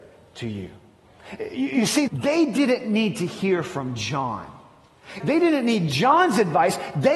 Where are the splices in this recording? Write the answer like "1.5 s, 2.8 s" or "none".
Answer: 2.1 s, 5.2 s